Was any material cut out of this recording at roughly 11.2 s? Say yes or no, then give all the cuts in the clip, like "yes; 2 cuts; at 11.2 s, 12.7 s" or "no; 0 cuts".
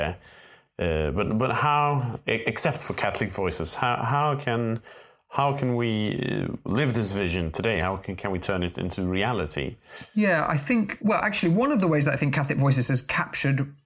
no; 0 cuts